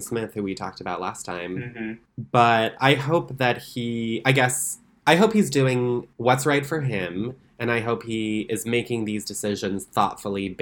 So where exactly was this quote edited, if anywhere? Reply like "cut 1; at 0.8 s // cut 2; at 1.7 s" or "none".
none